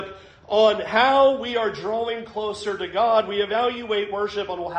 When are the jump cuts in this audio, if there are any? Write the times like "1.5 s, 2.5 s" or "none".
none